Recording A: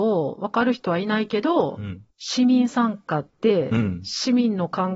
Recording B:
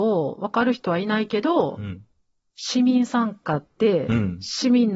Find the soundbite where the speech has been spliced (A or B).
A